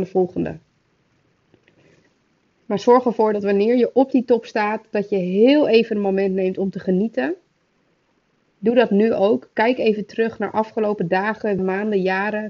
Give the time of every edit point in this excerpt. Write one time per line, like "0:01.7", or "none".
0:11.6